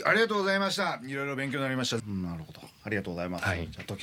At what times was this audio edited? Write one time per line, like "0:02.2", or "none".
0:02.0